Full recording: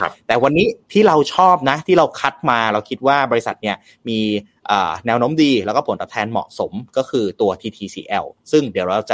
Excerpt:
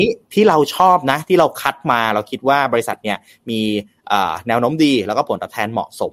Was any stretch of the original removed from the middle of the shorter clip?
no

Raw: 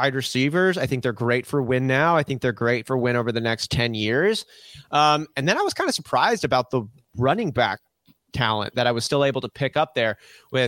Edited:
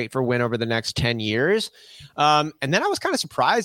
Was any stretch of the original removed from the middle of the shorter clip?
no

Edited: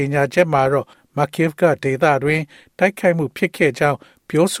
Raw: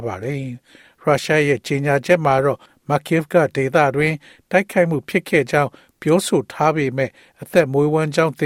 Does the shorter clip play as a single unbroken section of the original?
yes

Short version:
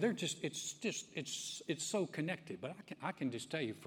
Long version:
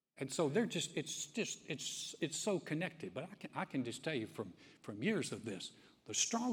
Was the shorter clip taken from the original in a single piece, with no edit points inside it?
yes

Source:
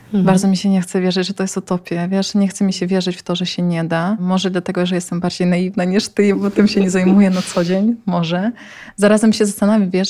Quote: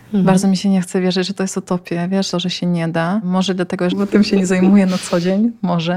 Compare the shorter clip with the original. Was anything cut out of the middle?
yes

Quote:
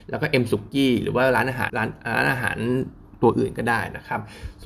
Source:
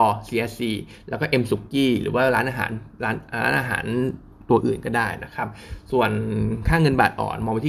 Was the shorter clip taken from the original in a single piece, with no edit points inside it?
no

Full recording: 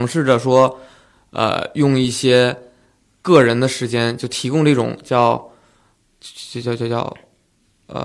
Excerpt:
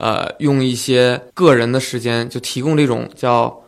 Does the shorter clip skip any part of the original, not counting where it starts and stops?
yes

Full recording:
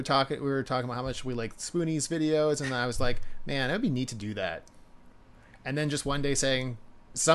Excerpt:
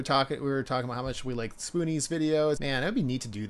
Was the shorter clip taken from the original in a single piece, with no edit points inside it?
no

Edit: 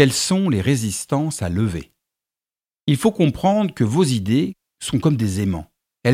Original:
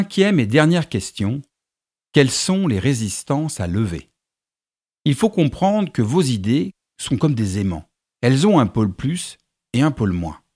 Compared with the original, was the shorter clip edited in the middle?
no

